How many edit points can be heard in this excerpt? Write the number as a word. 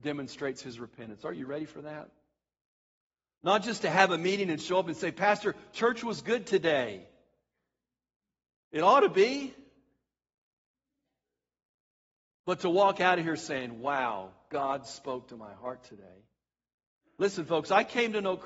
zero